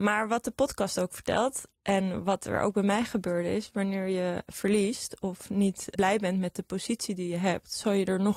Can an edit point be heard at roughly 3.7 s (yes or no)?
no